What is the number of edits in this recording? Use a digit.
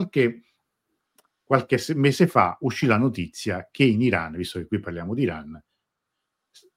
0